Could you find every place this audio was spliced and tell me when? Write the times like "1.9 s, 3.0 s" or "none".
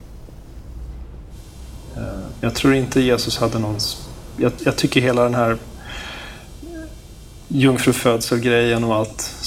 4.6 s